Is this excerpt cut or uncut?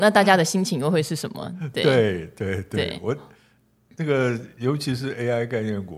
uncut